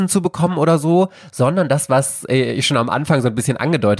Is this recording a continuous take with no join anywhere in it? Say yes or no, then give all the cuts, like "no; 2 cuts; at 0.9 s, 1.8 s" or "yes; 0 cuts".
yes; 0 cuts